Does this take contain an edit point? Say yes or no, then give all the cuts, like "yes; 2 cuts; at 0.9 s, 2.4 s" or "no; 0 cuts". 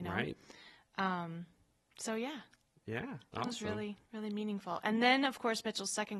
yes; 1 cut; at 4.0 s